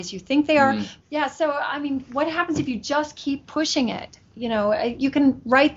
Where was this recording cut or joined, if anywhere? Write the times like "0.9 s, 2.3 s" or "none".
1.0 s